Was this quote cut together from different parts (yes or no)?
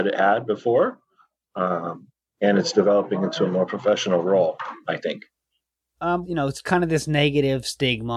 yes